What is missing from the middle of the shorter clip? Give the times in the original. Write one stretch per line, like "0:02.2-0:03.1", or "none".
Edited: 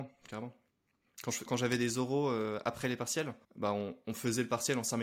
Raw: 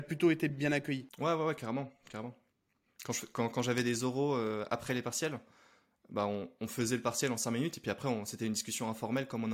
0:03.3-0:03.5
0:05.5-0:06.0